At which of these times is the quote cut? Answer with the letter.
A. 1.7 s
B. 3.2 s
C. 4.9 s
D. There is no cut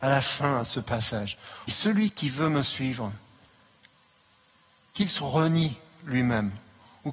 A